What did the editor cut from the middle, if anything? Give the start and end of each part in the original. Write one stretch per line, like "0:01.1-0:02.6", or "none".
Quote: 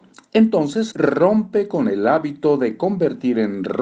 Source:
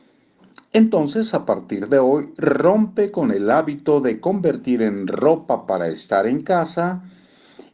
0:01.3-0:02.3